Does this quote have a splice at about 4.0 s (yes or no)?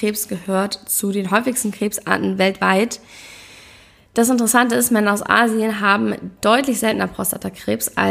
no